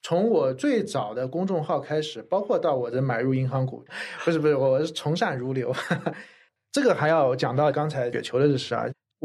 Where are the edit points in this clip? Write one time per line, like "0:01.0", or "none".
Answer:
0:03.9